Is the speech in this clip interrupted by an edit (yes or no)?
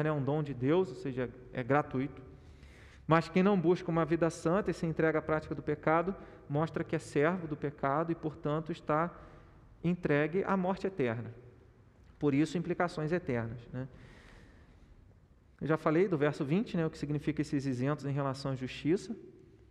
no